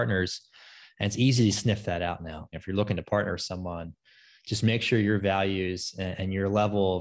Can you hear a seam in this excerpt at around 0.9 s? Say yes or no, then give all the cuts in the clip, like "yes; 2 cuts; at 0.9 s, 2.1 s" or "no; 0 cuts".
no; 1 cut; at 2.5 s